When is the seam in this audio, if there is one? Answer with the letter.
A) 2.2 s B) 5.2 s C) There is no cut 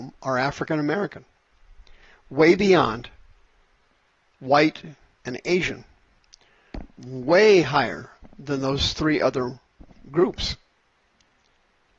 B